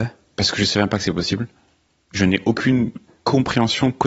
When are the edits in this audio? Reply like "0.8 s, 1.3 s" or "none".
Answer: none